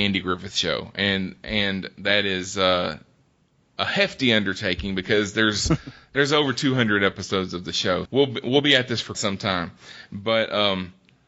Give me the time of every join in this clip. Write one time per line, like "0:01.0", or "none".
0:08.1
0:09.1